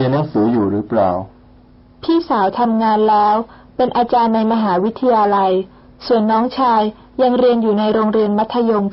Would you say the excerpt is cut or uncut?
uncut